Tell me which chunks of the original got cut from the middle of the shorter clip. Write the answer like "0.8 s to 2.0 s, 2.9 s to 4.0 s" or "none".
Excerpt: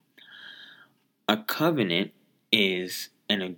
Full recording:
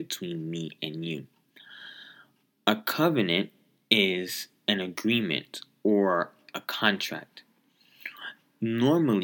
none